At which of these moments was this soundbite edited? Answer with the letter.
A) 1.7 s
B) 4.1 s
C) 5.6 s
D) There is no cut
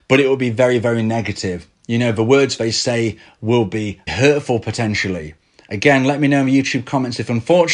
B